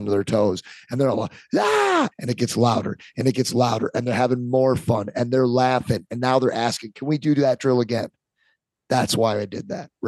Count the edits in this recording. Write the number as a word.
one